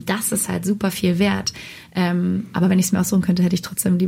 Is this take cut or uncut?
uncut